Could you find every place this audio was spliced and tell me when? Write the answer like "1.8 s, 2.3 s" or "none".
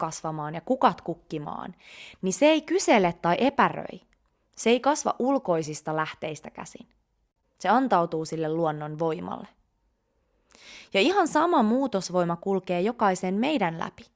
7.4 s